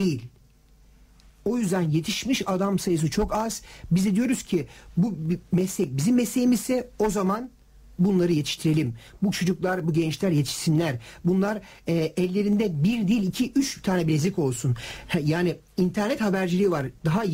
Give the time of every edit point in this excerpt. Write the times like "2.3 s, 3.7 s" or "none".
none